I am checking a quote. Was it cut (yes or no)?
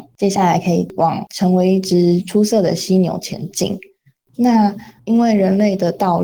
no